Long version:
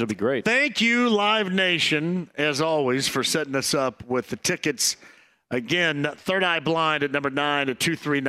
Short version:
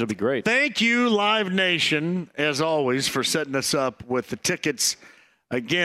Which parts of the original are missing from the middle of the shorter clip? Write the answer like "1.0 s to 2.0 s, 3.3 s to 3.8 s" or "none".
none